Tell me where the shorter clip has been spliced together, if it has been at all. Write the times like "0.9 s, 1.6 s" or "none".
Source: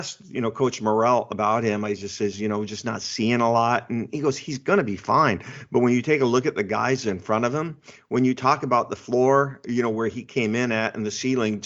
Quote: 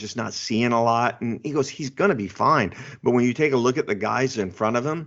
none